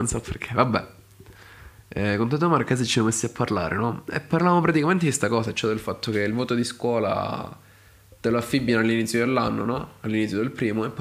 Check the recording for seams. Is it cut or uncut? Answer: uncut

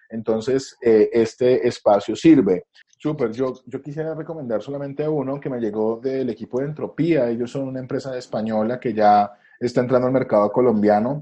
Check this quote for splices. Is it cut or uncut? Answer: cut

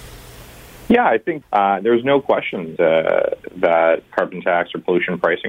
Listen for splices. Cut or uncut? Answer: cut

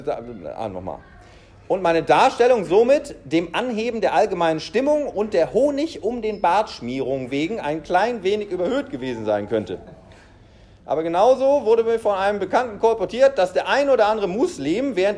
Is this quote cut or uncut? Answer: uncut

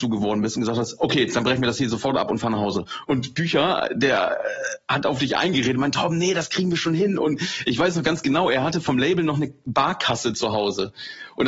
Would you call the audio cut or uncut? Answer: cut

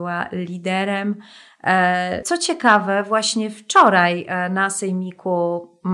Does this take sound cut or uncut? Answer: cut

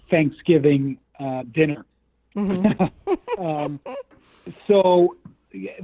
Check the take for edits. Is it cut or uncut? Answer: cut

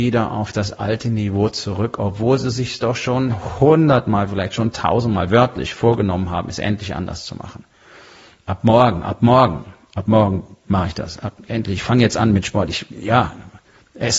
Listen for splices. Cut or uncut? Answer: cut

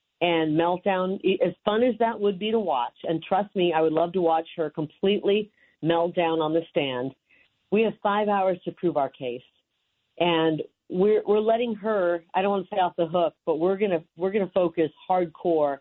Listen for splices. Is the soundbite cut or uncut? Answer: uncut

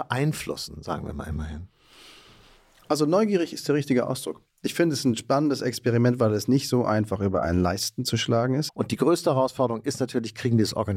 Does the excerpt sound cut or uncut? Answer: cut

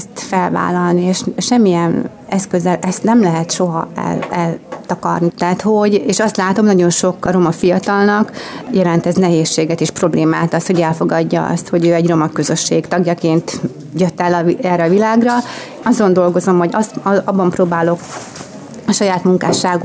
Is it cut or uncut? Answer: cut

